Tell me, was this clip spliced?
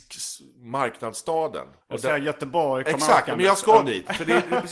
yes; 1 cut; at 1.8 s

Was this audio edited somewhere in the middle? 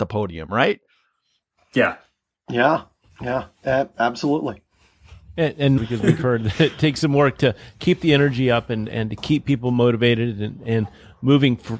yes; 1 cut; at 5.8 s

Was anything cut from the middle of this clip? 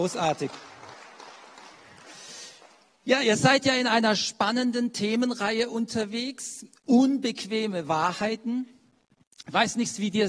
no; 0 cuts

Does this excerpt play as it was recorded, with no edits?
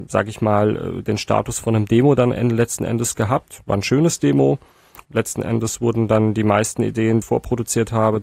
no; 2 cuts; at 5.0 s, 7.2 s

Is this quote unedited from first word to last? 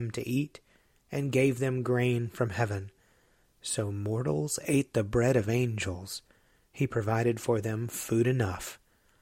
yes; 0 cuts

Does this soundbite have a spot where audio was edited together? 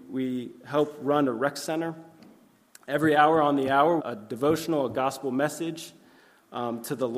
yes; 1 cut; at 4.0 s

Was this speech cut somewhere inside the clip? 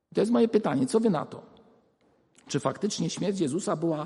no; 0 cuts

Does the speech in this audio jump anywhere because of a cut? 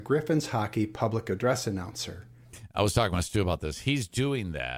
no; 0 cuts

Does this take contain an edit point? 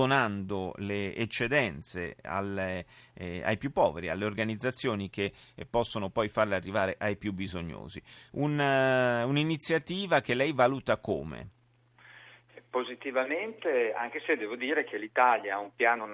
no; 0 cuts

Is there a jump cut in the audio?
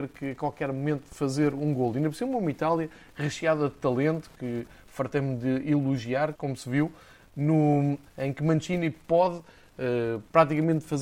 yes; 2 cuts; at 6.3 s, 8.1 s

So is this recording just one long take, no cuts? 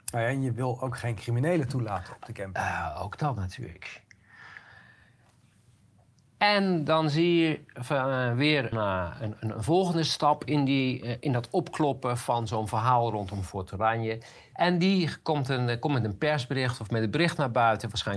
no; 2 cuts; at 8.7 s, 14.5 s

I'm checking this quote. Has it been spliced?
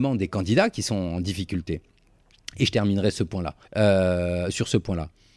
yes; 1 cut; at 3.6 s

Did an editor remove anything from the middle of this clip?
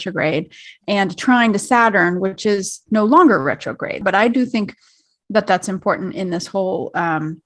no; 0 cuts

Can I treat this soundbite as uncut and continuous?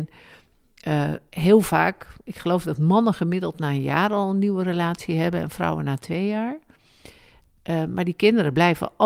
yes; 0 cuts

